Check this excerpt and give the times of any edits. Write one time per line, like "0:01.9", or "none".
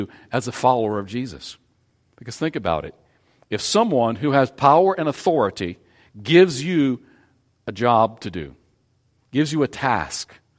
0:02.1